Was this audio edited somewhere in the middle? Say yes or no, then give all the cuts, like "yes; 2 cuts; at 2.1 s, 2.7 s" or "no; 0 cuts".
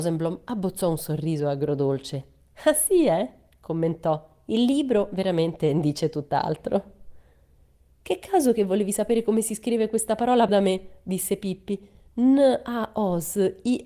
yes; 1 cut; at 10.5 s